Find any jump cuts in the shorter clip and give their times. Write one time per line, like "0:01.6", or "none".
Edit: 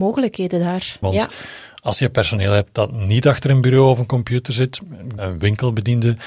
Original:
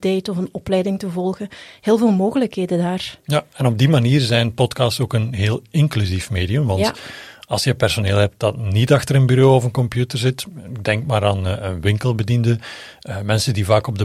0:01.0
0:05.2